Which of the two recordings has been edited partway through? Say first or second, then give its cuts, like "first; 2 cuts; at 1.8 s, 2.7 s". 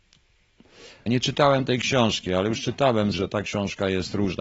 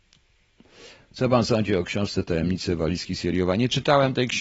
first; 2 cuts; at 1.1 s, 3.1 s